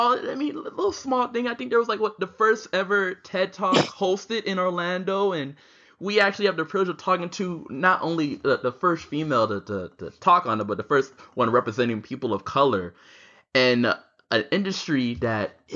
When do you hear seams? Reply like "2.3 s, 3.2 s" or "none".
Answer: none